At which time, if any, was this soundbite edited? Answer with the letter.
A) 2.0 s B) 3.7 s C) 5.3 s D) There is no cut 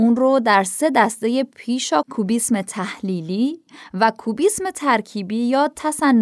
A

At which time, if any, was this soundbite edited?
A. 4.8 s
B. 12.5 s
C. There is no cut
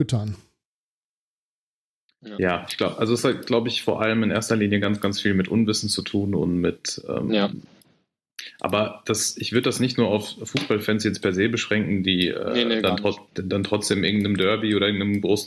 C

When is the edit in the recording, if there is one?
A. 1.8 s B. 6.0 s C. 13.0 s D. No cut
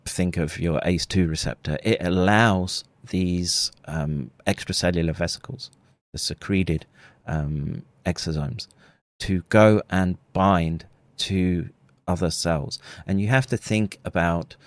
D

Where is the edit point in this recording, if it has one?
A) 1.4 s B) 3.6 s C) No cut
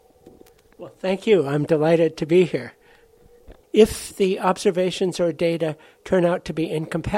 B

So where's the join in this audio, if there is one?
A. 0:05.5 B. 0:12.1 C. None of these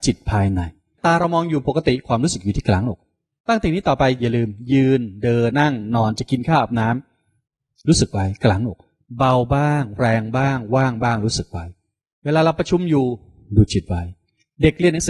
A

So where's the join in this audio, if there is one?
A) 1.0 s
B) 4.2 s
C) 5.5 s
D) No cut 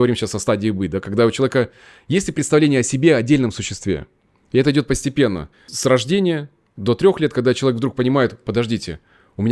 D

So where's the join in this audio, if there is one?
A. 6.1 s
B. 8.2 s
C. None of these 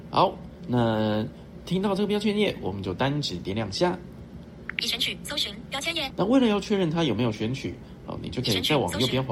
A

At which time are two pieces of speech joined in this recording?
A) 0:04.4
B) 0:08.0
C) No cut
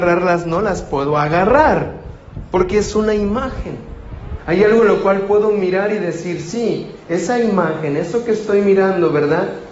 A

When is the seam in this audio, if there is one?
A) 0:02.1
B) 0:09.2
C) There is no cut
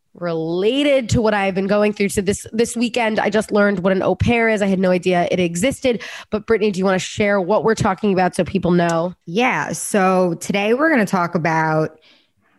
B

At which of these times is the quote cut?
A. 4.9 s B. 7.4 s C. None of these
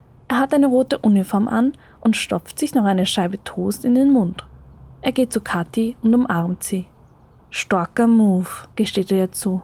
C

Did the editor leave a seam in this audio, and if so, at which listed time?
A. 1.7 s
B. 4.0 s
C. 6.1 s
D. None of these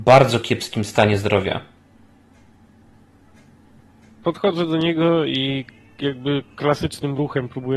B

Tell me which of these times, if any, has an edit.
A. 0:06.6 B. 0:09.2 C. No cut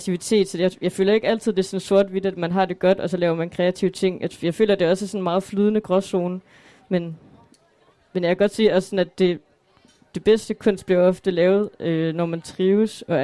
C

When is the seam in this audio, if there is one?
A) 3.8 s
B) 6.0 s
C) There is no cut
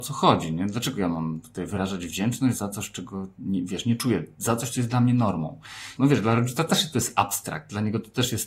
B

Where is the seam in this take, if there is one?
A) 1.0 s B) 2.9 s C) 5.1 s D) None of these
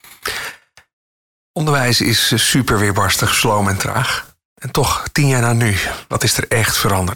D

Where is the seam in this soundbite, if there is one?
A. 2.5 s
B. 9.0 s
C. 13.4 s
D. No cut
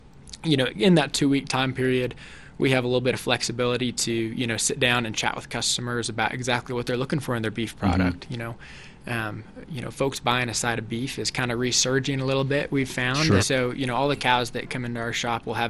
C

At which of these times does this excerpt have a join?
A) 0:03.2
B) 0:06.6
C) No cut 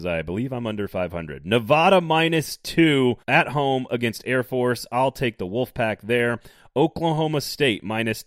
A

